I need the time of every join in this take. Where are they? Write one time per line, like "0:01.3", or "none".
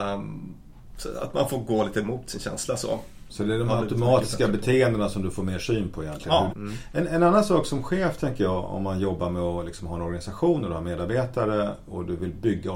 0:03.3
0:06.5